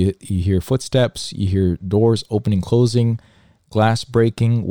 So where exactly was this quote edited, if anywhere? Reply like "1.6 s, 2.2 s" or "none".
none